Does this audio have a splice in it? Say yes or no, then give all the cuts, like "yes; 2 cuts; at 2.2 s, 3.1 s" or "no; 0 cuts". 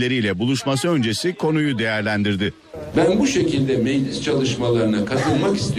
yes; 1 cut; at 2.9 s